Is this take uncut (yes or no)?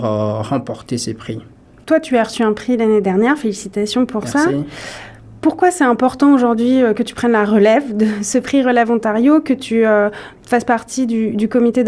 yes